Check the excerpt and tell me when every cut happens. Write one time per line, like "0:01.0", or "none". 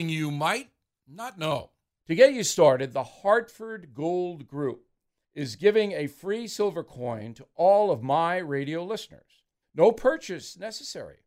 0:02.0
0:09.6